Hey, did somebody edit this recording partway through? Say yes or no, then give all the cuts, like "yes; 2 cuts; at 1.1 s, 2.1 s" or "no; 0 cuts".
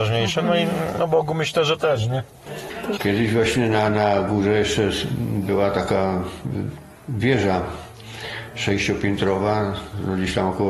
yes; 1 cut; at 3.0 s